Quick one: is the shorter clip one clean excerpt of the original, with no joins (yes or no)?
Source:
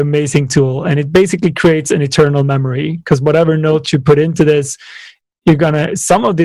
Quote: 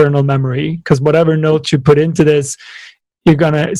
yes